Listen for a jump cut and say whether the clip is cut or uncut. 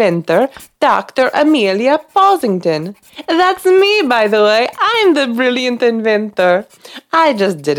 uncut